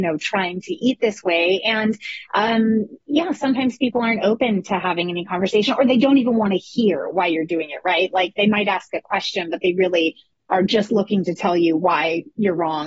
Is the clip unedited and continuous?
yes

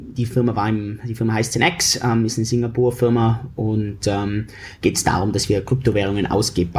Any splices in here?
no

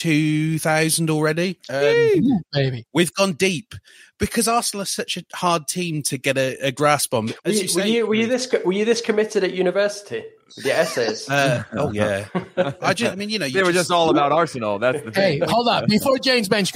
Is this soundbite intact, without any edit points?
yes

